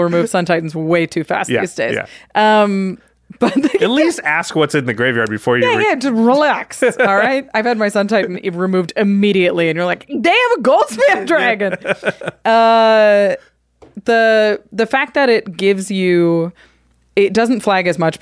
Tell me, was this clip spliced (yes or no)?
no